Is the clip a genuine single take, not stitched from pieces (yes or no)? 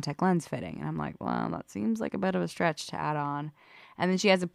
yes